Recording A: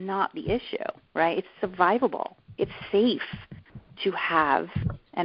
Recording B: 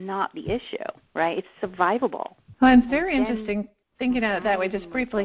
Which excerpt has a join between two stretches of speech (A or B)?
B